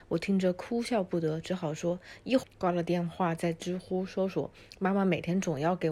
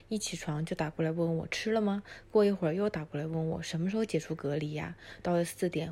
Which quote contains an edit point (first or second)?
first